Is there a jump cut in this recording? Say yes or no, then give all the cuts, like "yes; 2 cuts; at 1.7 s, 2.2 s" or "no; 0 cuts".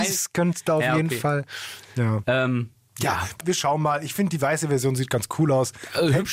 yes; 2 cuts; at 2.2 s, 3.4 s